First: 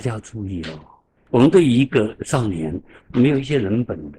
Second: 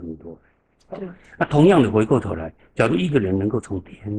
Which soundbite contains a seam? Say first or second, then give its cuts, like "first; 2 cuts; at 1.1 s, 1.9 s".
first; 2 cuts; at 1.2 s, 3.0 s